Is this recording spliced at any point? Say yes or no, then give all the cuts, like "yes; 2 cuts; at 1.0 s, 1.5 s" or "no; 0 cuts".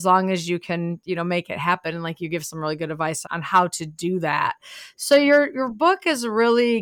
yes; 1 cut; at 3.2 s